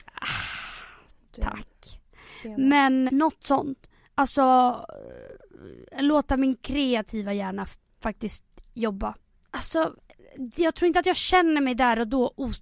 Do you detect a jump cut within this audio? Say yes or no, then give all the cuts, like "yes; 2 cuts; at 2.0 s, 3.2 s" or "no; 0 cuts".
yes; 2 cuts; at 3.1 s, 9.3 s